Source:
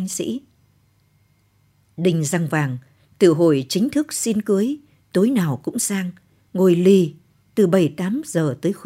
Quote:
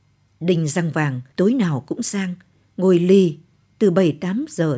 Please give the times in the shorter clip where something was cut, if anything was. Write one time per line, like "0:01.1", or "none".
0:01.3